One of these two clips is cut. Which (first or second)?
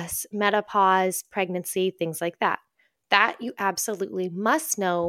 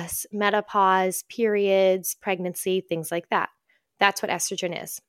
first